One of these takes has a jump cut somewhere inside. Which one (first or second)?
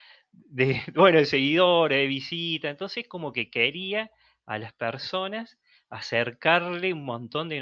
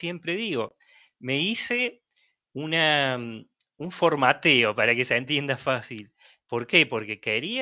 second